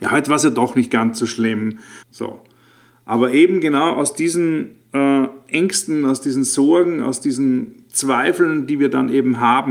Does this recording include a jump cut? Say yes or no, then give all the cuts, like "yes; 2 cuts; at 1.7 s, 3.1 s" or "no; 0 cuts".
yes; 1 cut; at 2.0 s